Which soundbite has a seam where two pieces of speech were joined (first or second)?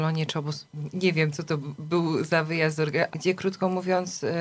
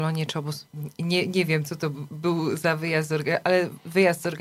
first